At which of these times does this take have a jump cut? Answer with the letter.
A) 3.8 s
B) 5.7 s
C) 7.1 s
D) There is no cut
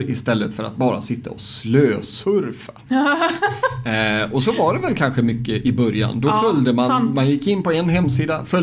D